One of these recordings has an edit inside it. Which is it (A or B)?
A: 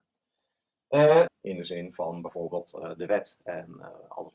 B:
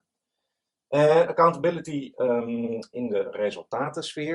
A